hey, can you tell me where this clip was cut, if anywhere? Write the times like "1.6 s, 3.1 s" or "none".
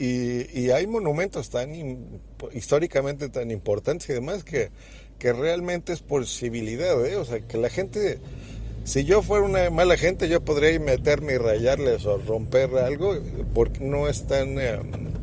7.4 s, 13.8 s